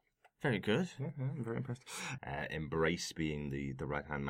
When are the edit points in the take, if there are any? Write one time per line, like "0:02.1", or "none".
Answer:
0:02.2